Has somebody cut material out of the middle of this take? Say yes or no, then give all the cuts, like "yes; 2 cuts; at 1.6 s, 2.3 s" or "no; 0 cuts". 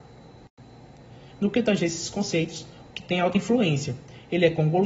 yes; 2 cuts; at 1.3 s, 2.9 s